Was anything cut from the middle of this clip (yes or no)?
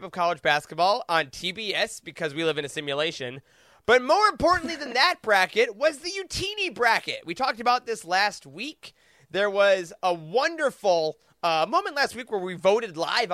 no